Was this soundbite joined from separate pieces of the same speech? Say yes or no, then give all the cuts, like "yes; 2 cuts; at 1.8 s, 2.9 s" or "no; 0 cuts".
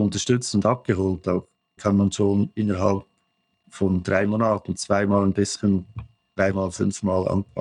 yes; 1 cut; at 1.8 s